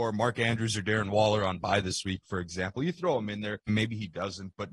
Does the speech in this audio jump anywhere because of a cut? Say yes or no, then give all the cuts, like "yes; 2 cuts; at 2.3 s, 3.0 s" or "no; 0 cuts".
yes; 1 cut; at 3.7 s